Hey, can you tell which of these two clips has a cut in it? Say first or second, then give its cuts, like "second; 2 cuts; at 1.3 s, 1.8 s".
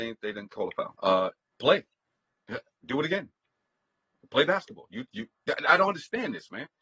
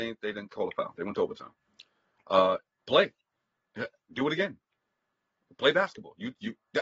first; 1 cut; at 1.0 s